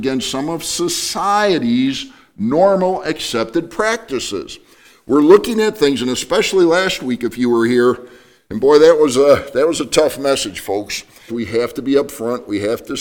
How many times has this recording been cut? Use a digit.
1